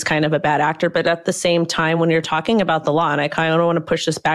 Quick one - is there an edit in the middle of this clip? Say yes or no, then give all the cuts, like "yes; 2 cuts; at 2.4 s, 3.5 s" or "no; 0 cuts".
no; 0 cuts